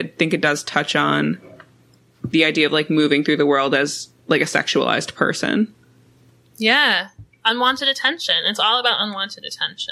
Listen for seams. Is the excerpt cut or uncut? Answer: uncut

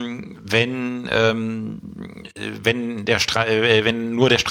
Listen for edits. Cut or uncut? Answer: uncut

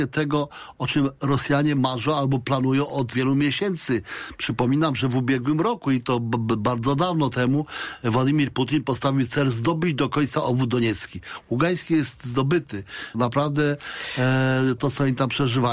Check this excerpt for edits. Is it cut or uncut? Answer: cut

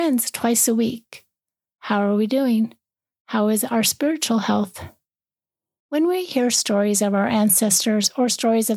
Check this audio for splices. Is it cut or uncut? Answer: uncut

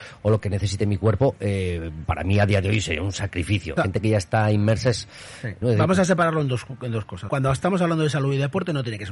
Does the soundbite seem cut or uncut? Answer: cut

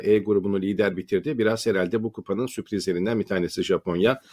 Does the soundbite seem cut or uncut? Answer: uncut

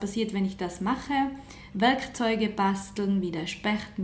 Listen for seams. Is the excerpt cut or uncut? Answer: uncut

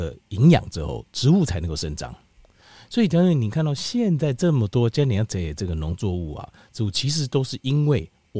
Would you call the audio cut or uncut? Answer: uncut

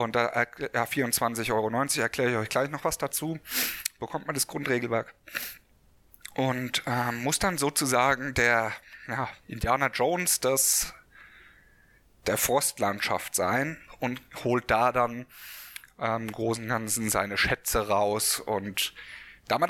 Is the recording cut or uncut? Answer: uncut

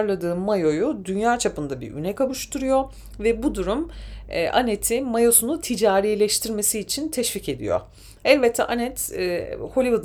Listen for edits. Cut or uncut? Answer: uncut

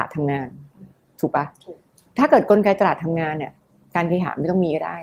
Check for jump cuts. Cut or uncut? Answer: uncut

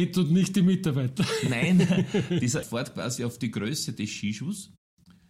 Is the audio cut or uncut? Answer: cut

